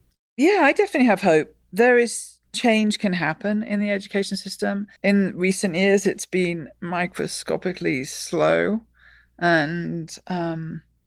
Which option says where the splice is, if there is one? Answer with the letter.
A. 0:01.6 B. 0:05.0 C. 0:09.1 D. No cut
B